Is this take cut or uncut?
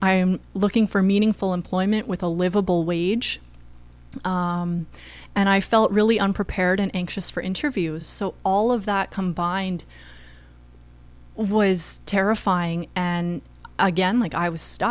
uncut